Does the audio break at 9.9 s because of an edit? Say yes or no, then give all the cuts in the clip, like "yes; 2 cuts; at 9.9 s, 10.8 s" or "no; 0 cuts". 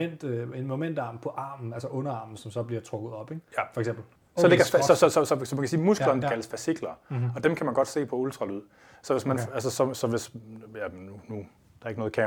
yes; 3 cuts; at 4.2 s, 6.2 s, 9.9 s